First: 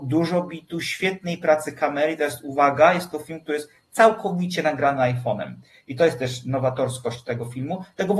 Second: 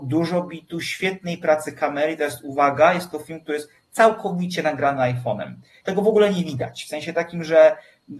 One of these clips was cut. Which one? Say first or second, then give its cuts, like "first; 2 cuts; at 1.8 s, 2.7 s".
second; 1 cut; at 5.8 s